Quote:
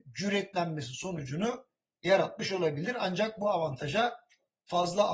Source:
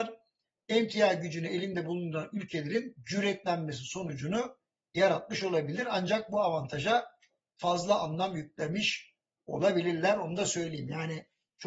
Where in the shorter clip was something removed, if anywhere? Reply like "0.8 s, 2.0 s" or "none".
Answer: none